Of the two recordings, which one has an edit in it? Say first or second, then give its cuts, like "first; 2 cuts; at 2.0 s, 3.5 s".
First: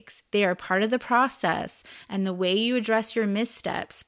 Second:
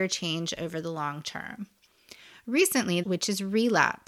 second; 1 cut; at 3.0 s